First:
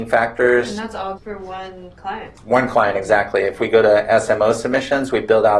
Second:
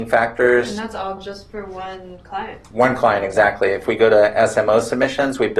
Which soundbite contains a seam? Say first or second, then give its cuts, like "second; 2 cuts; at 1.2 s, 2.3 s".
first; 1 cut; at 1.2 s